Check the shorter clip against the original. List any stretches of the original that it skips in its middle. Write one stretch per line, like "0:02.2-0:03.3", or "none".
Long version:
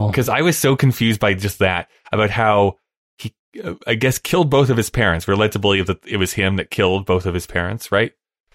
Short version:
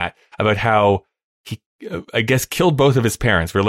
none